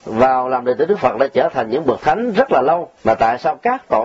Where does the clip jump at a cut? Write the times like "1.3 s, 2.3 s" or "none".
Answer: 3.0 s